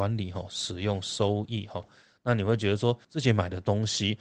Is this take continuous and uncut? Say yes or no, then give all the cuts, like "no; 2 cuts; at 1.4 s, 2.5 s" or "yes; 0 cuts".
no; 2 cuts; at 1.8 s, 3.0 s